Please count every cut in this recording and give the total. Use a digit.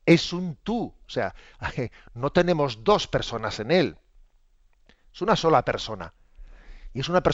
0